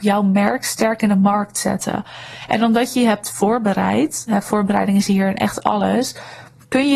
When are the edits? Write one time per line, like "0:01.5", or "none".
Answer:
none